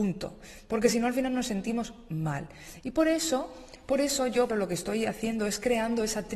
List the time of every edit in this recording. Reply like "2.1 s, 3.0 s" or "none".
4.5 s